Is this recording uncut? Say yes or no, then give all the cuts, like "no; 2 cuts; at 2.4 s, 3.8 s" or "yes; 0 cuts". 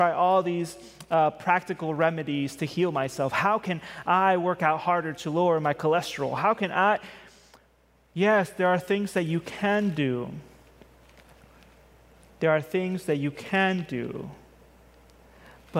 yes; 0 cuts